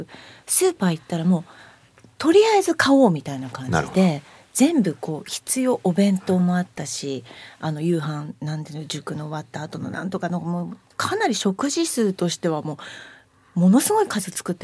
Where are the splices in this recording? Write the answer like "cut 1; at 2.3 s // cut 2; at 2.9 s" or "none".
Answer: none